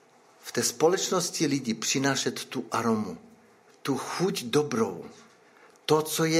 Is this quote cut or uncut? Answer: cut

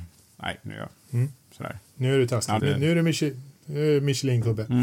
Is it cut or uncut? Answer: cut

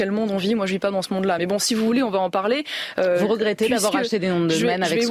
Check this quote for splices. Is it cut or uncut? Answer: uncut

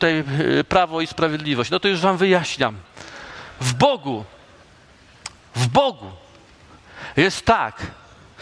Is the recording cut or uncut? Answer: uncut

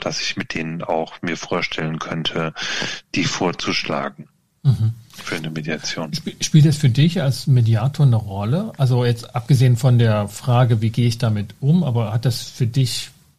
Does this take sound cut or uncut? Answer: uncut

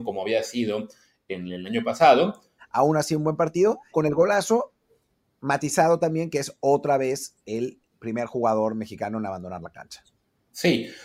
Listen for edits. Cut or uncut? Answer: cut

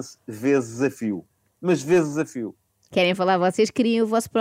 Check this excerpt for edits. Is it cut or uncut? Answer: cut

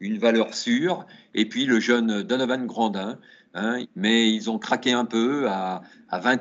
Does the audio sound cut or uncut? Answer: cut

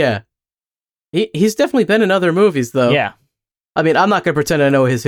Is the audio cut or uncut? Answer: uncut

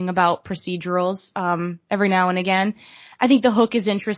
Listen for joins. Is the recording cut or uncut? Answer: uncut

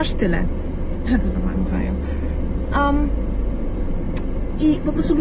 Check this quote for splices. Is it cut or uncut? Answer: cut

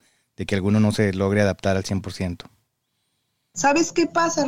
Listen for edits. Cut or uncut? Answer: uncut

